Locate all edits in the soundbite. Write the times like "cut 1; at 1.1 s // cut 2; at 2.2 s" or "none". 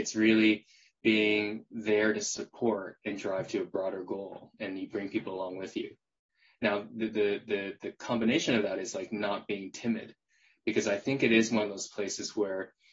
none